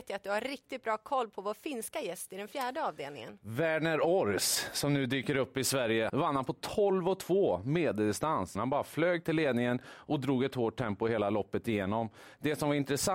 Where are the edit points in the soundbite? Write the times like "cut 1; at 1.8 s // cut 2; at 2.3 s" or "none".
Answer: cut 1; at 6.1 s // cut 2; at 8.5 s